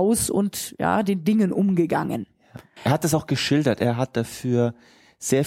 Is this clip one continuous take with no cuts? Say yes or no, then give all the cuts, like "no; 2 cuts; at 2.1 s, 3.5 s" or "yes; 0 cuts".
no; 1 cut; at 2.8 s